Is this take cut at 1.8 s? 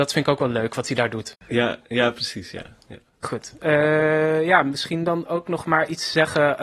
no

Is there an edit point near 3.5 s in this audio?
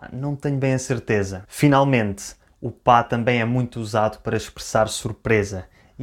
no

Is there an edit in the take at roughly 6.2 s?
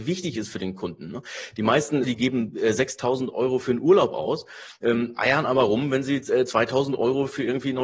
no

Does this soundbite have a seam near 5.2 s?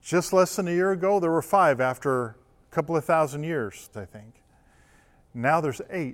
no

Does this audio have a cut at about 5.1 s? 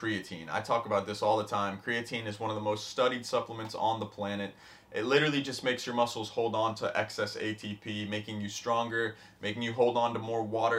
no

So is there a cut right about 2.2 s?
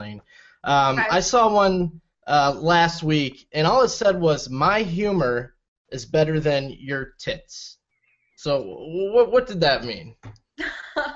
no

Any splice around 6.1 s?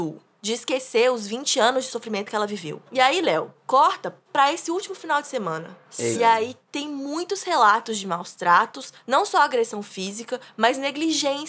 yes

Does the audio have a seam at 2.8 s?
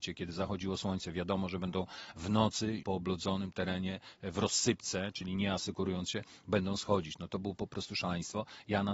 yes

